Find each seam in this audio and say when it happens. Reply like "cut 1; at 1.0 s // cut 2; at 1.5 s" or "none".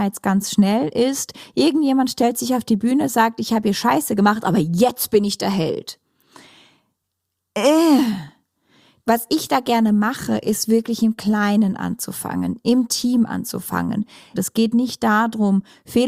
cut 1; at 9.0 s // cut 2; at 14.3 s